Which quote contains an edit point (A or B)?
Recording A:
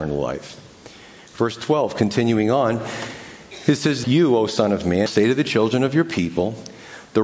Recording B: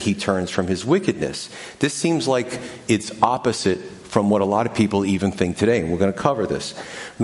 A